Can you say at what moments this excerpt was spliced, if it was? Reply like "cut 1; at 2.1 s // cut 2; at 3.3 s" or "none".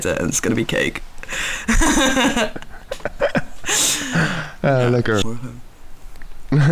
cut 1; at 5.2 s